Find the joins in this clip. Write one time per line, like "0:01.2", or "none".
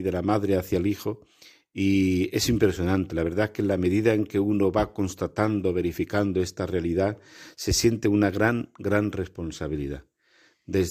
none